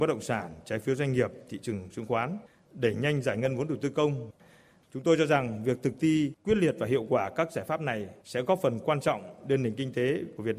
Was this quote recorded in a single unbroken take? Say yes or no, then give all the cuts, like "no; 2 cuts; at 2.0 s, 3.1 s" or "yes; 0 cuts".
yes; 0 cuts